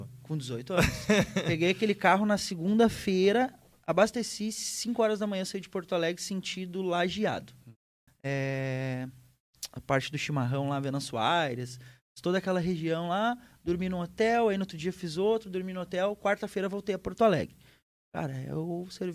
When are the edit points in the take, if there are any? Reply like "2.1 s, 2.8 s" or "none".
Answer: 8.1 s